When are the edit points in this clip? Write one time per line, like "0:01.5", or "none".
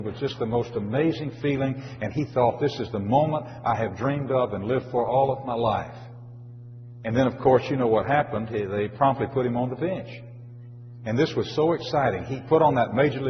0:11.0